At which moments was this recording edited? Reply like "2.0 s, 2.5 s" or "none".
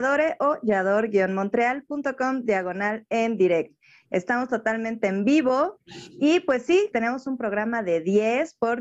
6.9 s